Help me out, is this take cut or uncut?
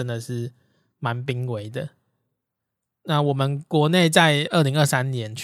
uncut